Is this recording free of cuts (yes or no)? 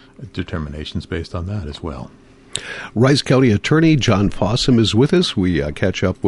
yes